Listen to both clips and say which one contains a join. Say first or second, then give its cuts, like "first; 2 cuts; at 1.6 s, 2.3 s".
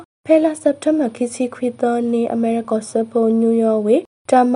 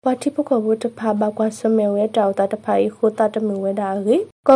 first; 1 cut; at 2.6 s